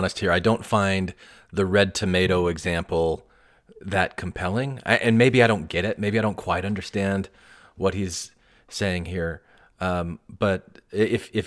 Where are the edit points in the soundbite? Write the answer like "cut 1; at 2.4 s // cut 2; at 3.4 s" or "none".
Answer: none